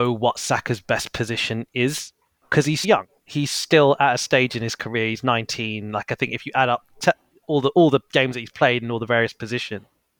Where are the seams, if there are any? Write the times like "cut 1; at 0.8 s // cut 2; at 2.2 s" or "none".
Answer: cut 1; at 2.8 s